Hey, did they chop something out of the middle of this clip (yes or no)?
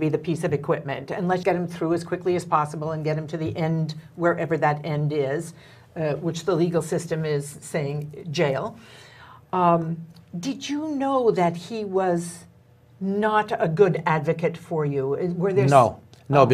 yes